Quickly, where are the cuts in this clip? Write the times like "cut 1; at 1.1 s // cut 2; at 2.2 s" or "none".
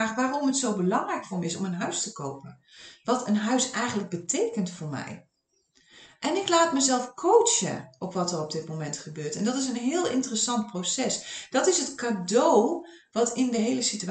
none